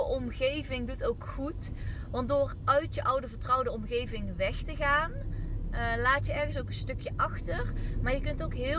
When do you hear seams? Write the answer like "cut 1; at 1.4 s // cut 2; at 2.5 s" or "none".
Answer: none